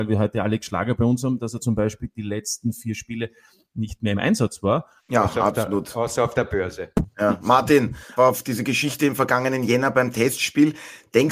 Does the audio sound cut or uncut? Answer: cut